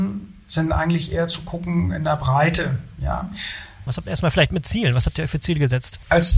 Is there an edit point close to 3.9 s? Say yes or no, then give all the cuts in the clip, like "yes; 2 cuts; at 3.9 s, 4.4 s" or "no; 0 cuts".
yes; 1 cut; at 3.9 s